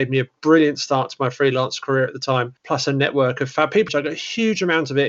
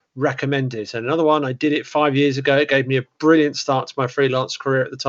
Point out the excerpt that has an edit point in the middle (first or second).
first